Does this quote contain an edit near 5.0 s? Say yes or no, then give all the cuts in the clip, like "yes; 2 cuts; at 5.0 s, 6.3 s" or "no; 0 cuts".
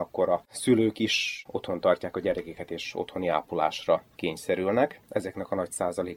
yes; 1 cut; at 5.0 s